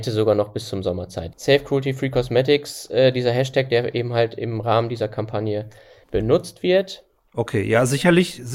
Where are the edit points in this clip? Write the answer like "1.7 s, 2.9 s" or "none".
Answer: 1.3 s